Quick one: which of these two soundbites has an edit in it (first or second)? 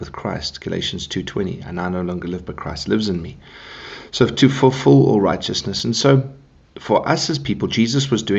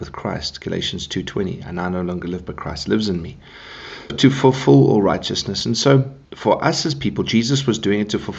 second